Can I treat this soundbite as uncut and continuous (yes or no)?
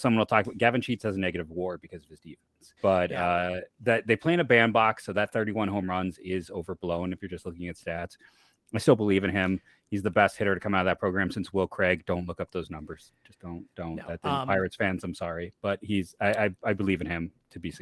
no